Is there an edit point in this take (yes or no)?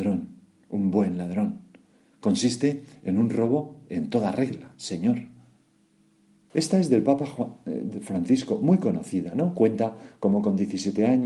yes